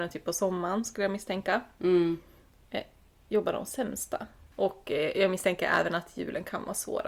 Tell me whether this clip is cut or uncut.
cut